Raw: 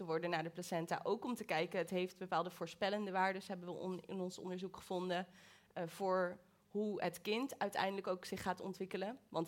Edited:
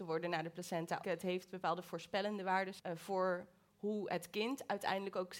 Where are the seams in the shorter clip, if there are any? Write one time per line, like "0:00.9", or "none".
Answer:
0:01.0
0:02.8